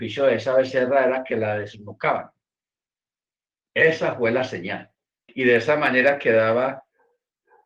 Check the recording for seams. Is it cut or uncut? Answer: cut